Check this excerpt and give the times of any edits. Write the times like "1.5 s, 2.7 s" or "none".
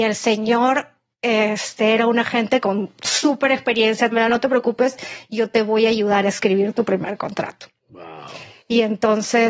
4.1 s